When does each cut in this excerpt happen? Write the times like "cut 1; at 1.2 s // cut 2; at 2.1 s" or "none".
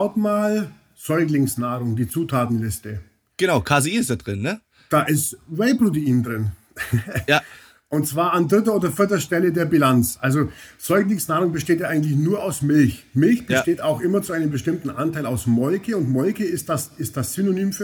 none